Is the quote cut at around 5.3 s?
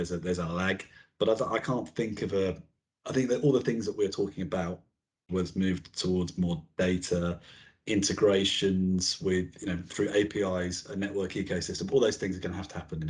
yes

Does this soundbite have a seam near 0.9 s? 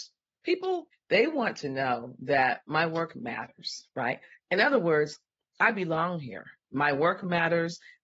yes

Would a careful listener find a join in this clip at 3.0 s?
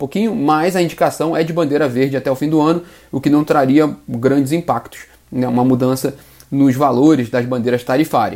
no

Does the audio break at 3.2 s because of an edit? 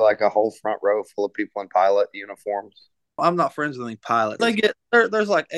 yes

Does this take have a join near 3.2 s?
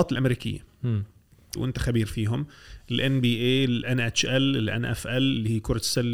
no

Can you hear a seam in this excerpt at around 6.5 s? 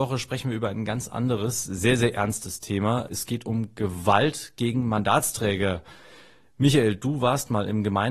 no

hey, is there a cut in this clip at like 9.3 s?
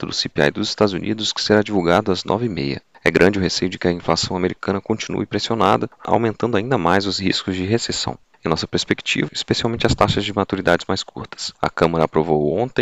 yes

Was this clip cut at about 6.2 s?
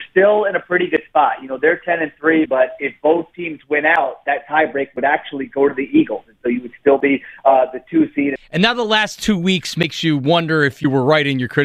no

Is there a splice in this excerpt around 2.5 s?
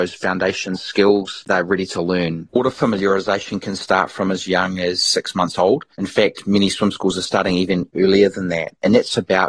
yes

